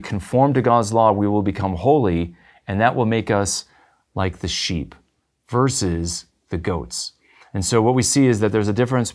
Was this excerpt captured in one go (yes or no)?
yes